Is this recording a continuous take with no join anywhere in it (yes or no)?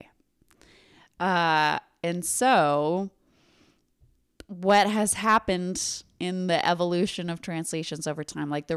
yes